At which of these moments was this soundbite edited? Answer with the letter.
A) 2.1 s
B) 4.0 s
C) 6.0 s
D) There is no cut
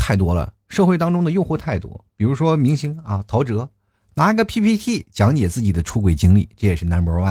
A